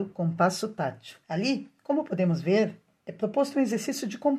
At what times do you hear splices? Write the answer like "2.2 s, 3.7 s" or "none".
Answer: 1.2 s